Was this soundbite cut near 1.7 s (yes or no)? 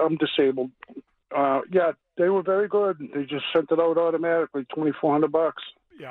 no